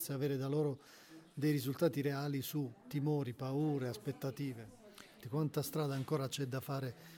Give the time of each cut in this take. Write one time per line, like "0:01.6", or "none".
0:05.2